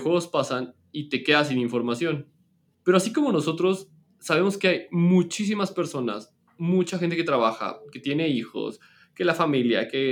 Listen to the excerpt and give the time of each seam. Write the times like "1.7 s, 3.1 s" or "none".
2.7 s